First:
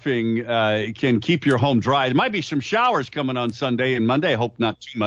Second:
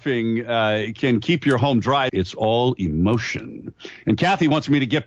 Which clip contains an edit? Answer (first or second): second